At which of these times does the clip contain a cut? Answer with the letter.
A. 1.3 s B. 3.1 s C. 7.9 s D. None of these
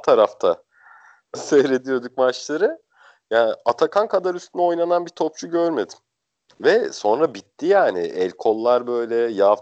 A